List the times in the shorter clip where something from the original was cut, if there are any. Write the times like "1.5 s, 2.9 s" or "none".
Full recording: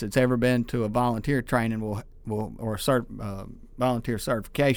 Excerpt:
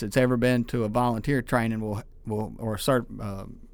none